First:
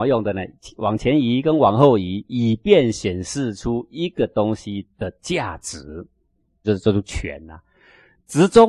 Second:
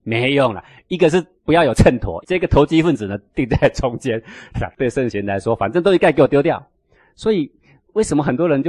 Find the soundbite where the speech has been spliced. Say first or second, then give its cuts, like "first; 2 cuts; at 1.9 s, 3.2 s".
second; 2 cuts; at 2.2 s, 4.5 s